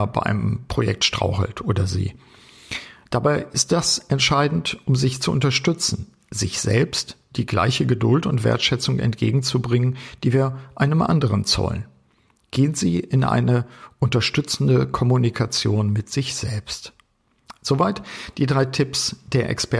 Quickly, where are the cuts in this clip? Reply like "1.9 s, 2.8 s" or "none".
none